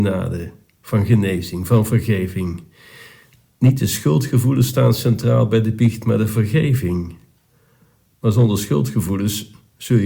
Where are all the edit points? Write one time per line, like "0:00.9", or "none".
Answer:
none

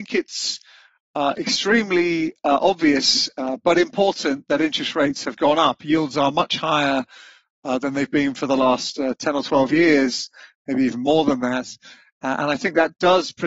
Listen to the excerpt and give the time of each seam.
none

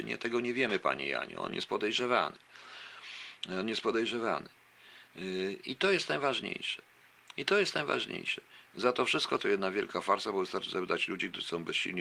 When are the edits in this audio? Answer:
0:09.4

